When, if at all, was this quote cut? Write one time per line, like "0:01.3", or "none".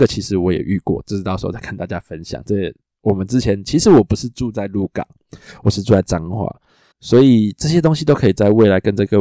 0:06.9